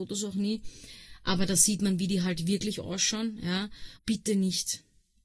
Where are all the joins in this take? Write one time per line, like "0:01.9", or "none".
0:04.0

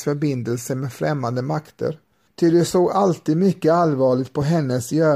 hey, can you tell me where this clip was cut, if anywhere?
0:02.3

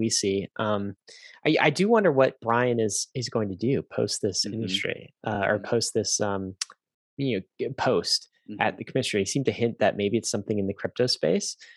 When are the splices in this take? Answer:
none

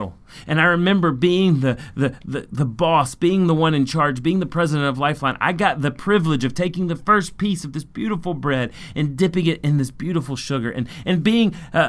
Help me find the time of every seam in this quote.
none

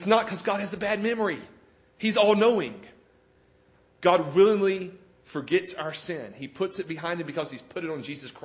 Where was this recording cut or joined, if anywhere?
none

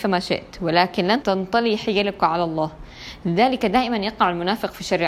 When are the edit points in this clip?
0:01.2

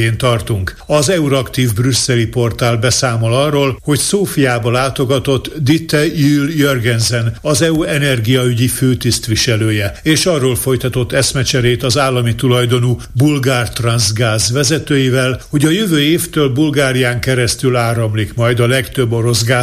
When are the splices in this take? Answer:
none

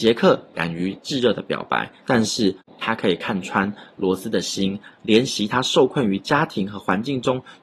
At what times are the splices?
0:02.0
0:04.9

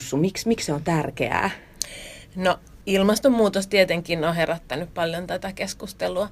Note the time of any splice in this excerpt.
0:02.8

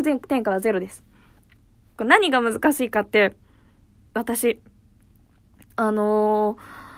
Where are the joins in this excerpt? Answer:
0:01.9

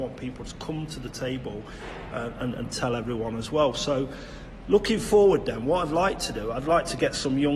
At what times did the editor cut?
none

